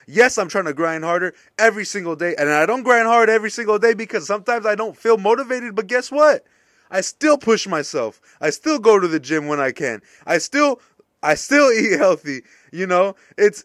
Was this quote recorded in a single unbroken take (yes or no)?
yes